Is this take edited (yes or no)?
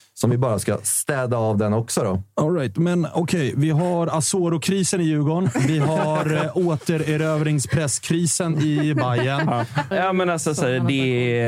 yes